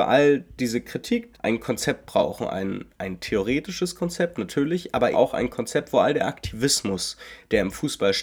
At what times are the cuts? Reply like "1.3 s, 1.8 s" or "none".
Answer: 1.3 s, 5.1 s

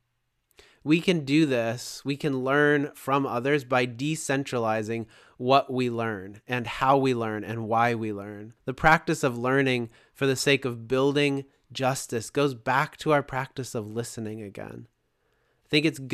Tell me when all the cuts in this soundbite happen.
8.6 s

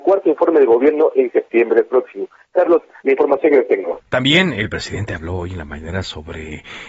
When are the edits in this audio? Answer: 4.1 s

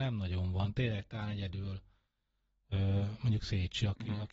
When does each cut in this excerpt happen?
none

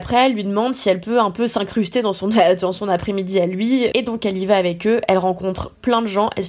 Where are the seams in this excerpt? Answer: 3.9 s

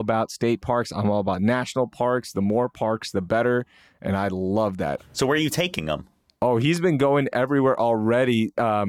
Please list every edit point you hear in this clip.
5.0 s

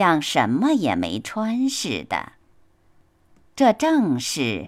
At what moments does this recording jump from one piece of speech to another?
none

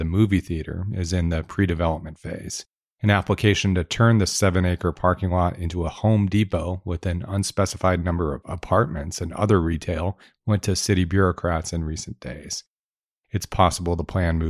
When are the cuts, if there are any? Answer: 13.2 s

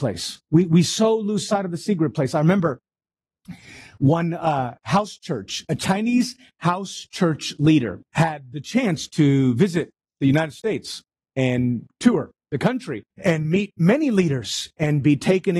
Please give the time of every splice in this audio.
8.0 s, 13.1 s

